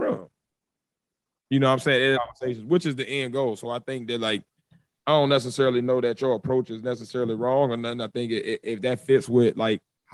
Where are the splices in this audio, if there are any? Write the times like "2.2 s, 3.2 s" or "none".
2.1 s

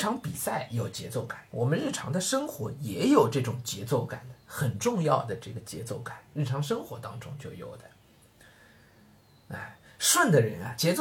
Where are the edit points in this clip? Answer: none

